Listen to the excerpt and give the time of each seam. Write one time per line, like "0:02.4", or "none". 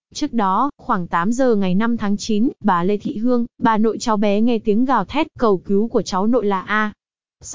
none